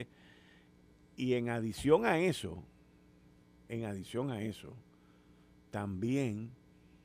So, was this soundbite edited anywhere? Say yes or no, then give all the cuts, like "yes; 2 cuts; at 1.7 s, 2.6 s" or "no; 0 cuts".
no; 0 cuts